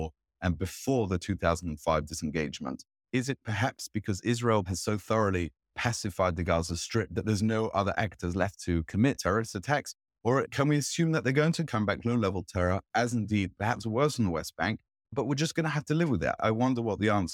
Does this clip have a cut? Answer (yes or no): no